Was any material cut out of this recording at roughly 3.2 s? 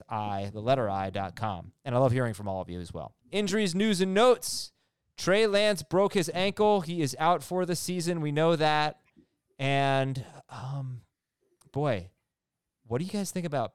yes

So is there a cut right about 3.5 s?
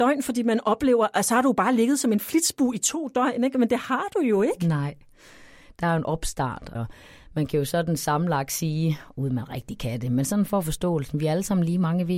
no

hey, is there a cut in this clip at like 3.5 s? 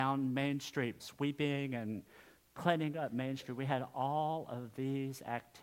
no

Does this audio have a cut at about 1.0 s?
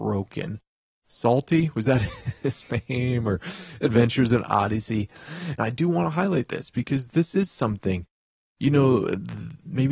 yes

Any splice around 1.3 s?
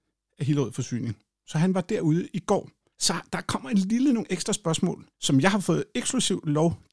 no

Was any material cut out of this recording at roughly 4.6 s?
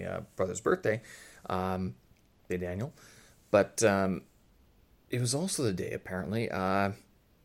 no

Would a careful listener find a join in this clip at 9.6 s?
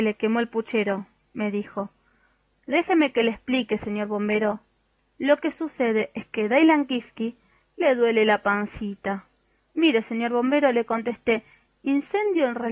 yes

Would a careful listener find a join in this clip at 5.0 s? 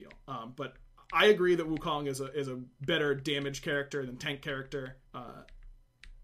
yes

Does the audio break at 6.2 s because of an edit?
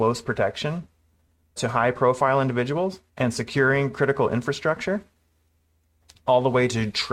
no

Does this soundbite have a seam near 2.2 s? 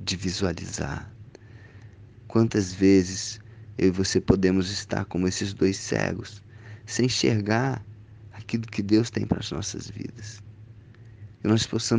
no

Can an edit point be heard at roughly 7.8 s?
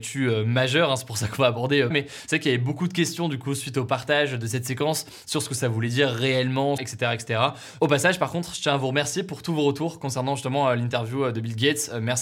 yes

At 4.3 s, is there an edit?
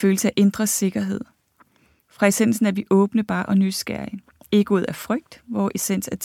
no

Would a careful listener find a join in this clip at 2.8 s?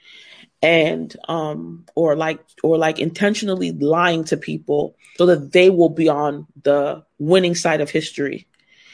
no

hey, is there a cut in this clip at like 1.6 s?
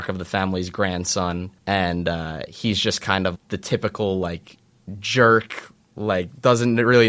yes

